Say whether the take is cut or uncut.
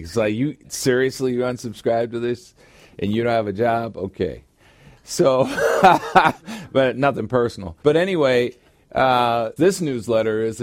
cut